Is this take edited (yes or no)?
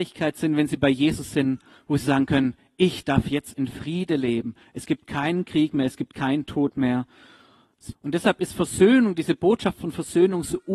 yes